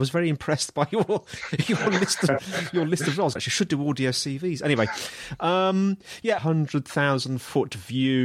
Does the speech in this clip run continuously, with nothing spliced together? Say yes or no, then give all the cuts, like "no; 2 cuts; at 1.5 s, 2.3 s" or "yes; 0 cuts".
no; 2 cuts; at 3.4 s, 6.4 s